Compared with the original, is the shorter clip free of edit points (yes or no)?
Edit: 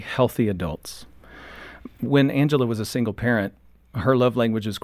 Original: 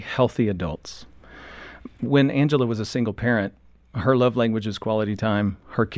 yes